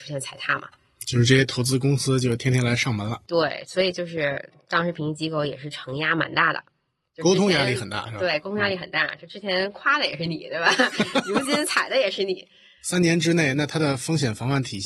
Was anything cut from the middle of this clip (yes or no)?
no